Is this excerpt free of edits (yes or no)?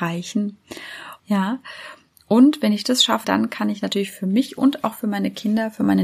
no